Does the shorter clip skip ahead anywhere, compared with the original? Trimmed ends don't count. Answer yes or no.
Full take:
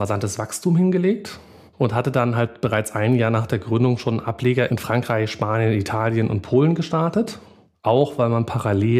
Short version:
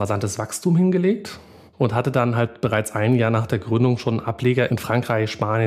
no